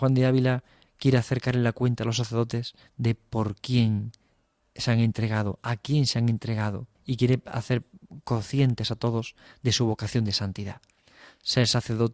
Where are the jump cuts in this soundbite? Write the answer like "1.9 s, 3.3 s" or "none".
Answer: 6.9 s